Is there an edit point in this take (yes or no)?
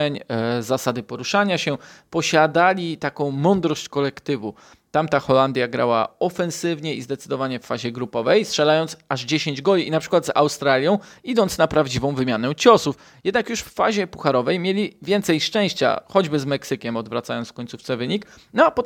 no